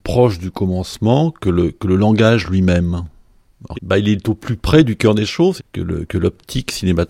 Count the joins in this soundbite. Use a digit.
2